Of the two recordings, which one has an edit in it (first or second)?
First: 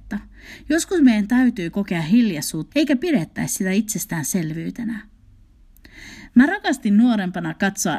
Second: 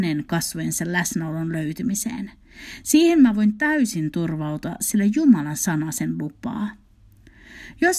first